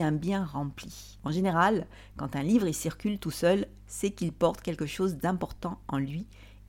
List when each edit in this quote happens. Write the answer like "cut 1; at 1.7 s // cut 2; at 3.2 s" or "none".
cut 1; at 1.2 s

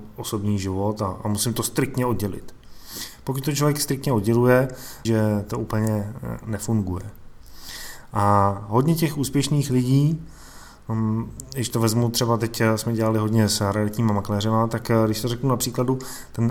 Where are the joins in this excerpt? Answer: cut 1; at 5.0 s

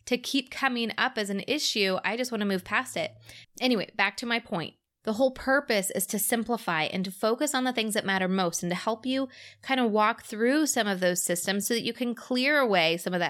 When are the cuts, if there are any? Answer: cut 1; at 3.4 s

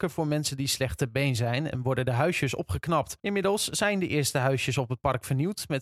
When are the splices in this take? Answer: cut 1; at 3.2 s

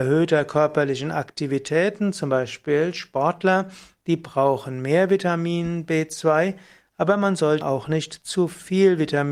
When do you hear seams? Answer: cut 1; at 7.6 s

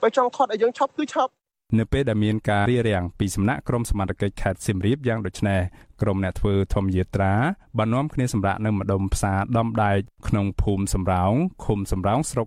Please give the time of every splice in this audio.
cut 1; at 2.7 s

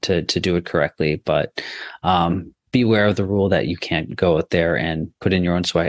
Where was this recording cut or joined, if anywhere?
none

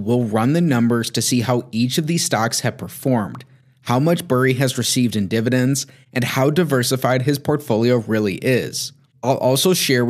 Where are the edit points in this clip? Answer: none

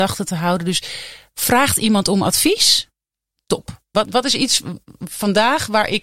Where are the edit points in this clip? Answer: cut 1; at 3.9 s

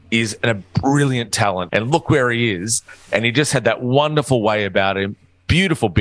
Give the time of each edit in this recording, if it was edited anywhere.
cut 1; at 1.7 s

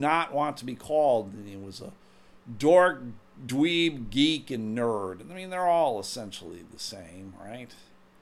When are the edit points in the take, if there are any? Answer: none

